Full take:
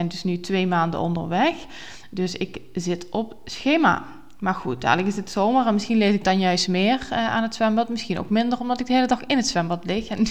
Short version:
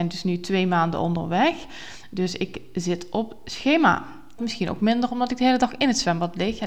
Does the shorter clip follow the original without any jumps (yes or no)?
no